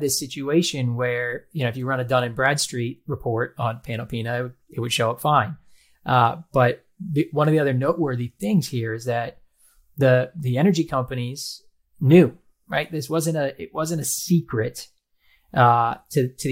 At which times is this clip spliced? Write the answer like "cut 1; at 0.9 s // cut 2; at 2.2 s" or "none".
none